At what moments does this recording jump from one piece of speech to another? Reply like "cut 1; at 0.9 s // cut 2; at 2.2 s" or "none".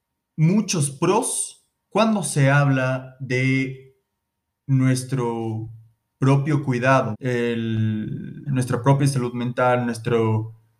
cut 1; at 7.1 s // cut 2; at 8.5 s